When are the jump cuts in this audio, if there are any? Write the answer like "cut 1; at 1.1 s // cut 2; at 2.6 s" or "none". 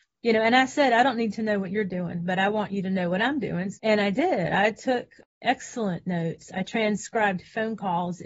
cut 1; at 3.8 s